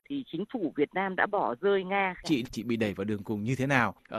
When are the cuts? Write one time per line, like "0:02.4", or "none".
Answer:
0:02.2